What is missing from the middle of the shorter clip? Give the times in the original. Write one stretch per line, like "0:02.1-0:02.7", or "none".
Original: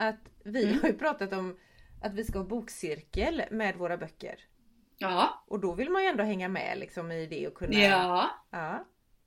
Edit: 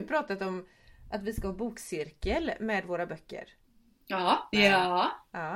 0:05.4-0:07.7